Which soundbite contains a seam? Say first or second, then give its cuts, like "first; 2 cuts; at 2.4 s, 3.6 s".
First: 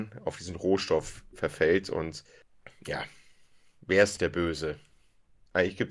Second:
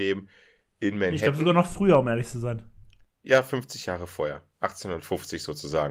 first; 1 cut; at 4.2 s